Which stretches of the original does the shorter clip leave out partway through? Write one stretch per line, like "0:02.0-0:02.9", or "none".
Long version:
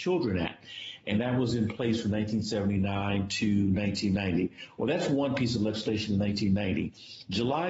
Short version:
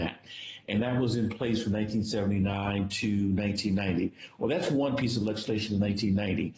none